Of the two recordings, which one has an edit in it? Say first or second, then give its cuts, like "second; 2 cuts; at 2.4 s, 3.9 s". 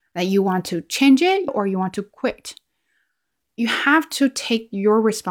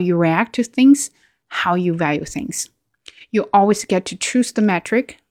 first; 1 cut; at 1.5 s